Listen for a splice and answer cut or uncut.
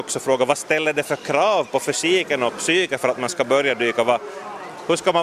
uncut